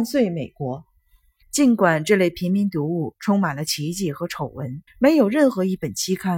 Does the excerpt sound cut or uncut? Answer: cut